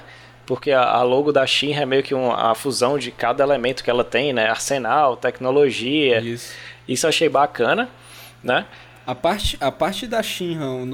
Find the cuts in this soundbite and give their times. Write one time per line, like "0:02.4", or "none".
none